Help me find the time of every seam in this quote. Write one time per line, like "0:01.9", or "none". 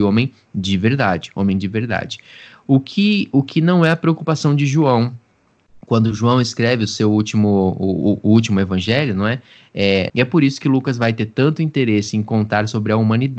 0:10.1